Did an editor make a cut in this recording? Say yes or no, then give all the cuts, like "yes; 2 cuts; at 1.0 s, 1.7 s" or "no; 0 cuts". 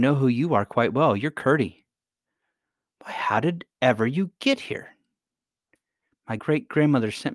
yes; 1 cut; at 6.4 s